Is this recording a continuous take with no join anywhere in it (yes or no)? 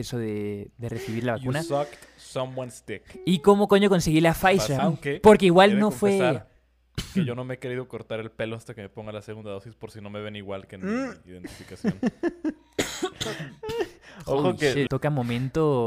no